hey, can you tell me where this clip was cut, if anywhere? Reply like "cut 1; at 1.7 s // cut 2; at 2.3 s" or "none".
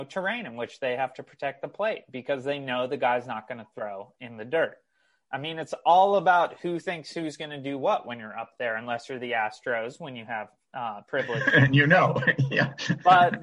none